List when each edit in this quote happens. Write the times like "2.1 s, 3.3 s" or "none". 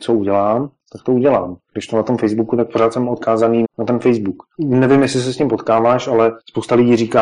3.6 s